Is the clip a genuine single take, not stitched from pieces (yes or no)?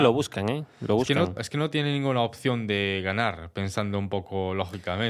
no